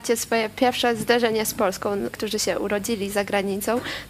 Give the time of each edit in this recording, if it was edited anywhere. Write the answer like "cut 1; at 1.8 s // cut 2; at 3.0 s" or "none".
cut 1; at 2.1 s